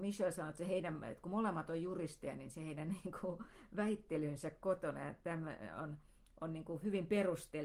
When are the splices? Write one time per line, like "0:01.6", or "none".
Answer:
none